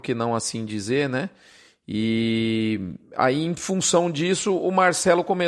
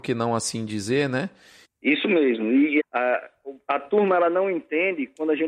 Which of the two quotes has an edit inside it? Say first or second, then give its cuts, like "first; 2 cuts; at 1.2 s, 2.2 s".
second; 2 cuts; at 1.6 s, 2.8 s